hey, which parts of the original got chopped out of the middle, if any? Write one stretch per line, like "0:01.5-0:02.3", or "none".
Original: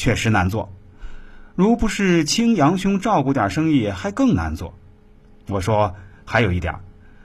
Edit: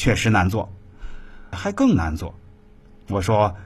0:01.5-0:03.9